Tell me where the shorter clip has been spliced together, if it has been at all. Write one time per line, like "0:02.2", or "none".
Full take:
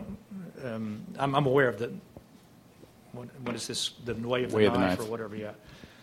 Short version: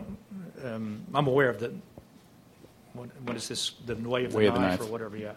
0:01.1